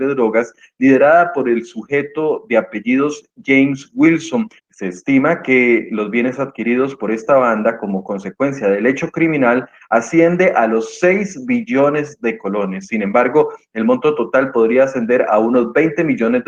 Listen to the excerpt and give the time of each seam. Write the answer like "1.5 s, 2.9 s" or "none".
4.6 s